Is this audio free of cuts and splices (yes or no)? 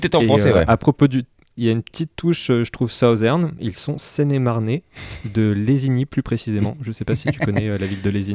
no